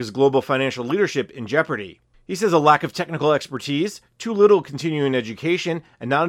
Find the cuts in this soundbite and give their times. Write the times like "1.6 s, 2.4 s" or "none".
none